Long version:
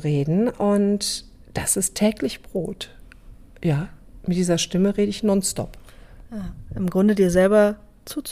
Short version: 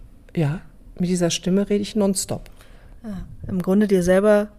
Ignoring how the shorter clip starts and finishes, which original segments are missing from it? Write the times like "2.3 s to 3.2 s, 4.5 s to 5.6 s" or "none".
none